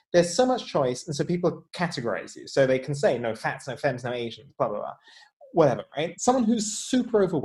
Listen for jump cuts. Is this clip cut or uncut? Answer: cut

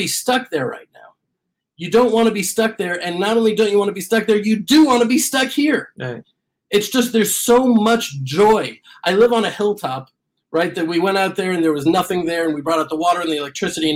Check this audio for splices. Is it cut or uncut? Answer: uncut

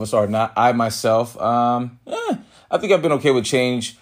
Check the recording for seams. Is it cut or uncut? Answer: uncut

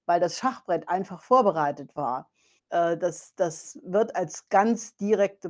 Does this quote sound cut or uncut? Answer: cut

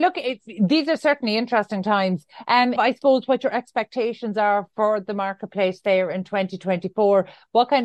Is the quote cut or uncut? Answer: cut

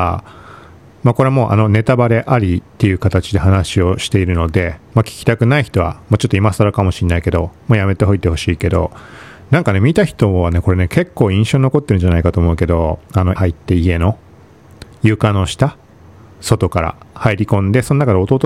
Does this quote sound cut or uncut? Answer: cut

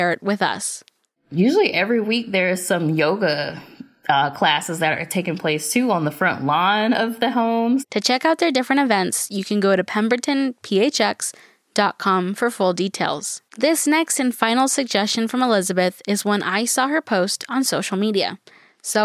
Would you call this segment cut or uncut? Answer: cut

